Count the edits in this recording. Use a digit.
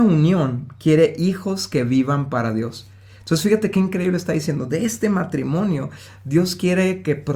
0